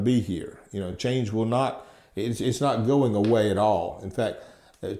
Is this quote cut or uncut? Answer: uncut